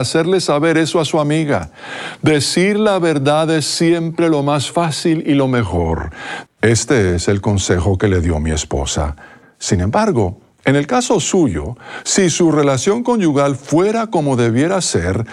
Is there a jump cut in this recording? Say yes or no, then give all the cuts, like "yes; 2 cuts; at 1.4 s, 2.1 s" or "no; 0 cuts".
yes; 2 cuts; at 6.5 s, 9.4 s